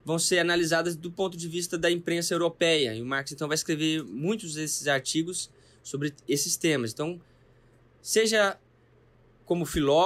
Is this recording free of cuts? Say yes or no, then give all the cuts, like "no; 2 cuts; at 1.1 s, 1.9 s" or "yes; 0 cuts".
yes; 0 cuts